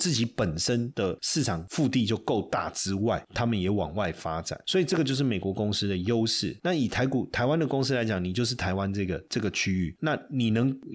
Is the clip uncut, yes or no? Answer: yes